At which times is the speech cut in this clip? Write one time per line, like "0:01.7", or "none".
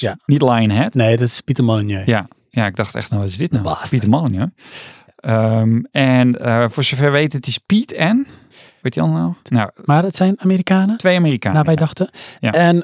0:09.4